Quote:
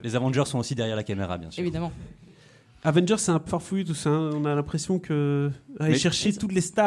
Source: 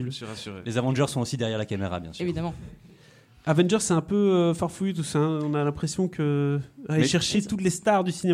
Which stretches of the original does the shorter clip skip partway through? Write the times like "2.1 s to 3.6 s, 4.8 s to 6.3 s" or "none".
4.1 s to 4.6 s